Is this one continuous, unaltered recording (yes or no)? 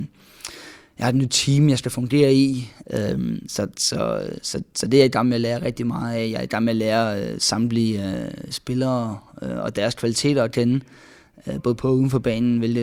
no